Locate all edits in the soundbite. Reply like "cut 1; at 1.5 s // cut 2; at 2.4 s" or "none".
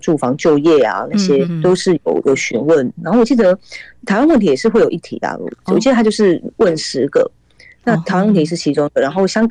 cut 1; at 1.4 s

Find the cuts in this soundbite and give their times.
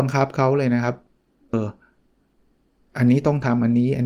cut 1; at 1.5 s

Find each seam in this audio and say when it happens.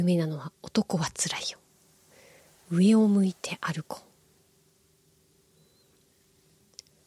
none

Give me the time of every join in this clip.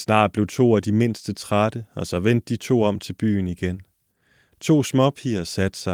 none

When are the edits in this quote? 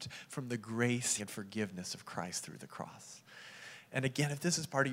cut 1; at 1.2 s

